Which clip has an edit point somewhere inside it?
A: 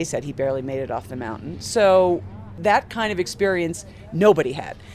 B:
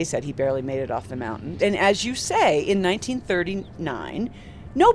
B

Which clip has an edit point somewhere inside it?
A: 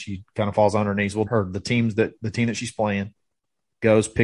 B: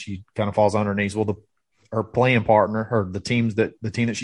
A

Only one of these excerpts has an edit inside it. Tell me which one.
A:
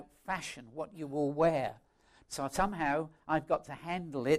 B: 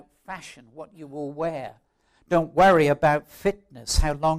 A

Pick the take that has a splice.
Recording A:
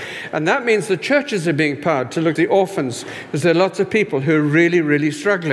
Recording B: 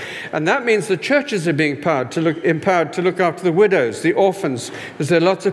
A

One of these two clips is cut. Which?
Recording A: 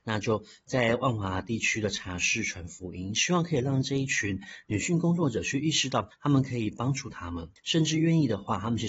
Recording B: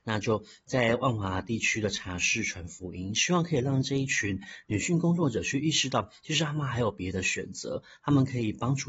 A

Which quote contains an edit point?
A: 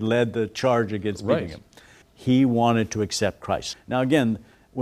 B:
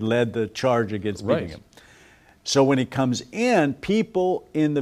A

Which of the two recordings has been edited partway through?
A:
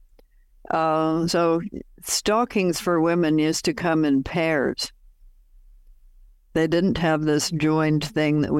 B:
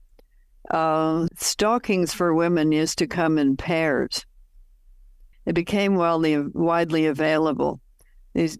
B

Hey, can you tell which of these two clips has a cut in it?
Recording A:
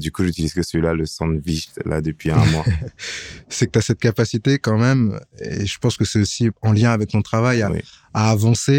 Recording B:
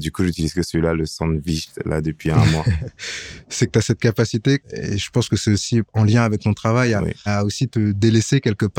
B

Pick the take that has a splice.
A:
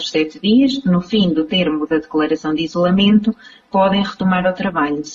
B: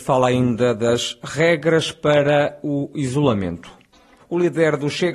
B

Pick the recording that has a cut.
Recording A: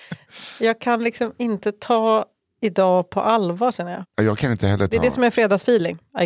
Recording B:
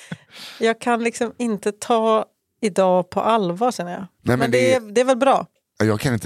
A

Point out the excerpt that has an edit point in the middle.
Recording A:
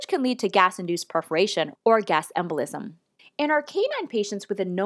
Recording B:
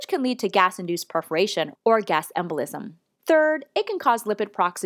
A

